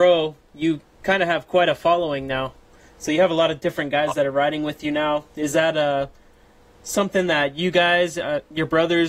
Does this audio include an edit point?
no; 0 cuts

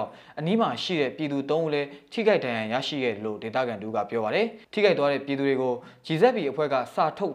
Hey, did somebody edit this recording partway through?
yes; 1 cut; at 4.6 s

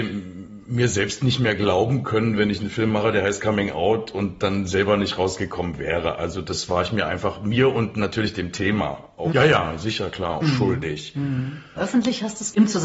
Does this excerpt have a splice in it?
yes; 3 cuts; at 9.3 s, 10.4 s, 11.8 s

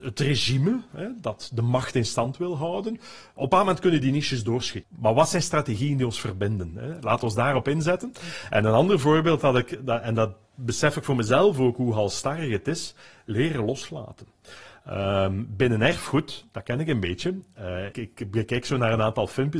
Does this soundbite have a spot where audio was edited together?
yes; 2 cuts; at 4.8 s, 17.9 s

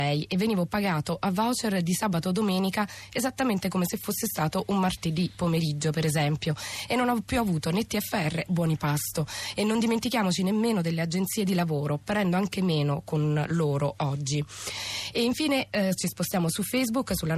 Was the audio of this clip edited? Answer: yes; 1 cut; at 8.5 s

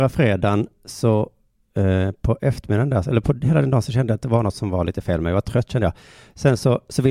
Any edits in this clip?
no; 0 cuts

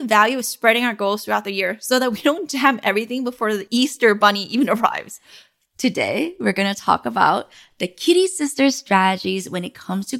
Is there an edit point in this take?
no; 0 cuts

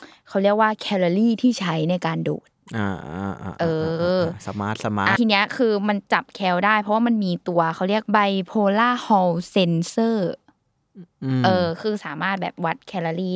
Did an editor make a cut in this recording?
yes; 1 cut; at 5.2 s

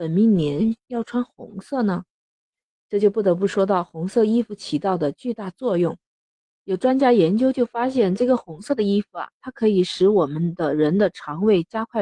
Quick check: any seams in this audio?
no; 0 cuts

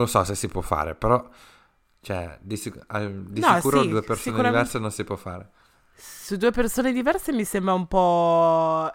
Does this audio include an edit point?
no; 0 cuts

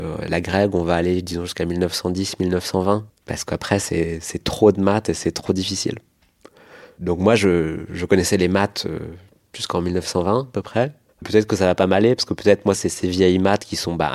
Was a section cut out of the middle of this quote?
yes; 2 cuts; at 11.1 s, 12.7 s

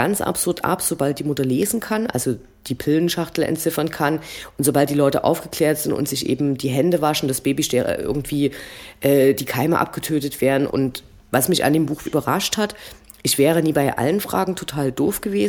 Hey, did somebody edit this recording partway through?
yes; 2 cuts; at 10.7 s, 12.1 s

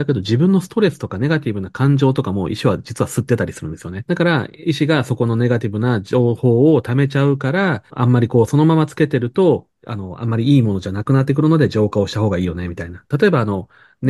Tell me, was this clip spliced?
yes; 3 cuts; at 4.1 s, 7.9 s, 13.1 s

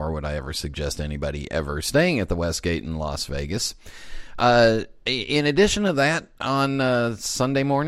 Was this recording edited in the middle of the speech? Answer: no; 0 cuts

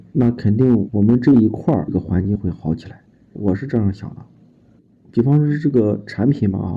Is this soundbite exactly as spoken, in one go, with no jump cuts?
yes; 0 cuts

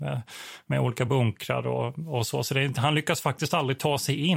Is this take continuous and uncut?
yes; 0 cuts

